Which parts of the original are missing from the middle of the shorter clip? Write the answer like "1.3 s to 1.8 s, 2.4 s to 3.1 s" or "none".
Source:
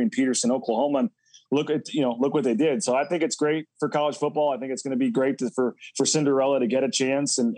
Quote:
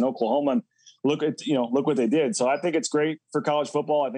none